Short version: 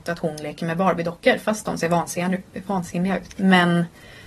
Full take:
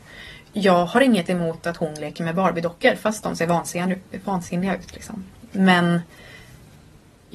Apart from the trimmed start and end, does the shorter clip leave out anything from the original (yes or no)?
yes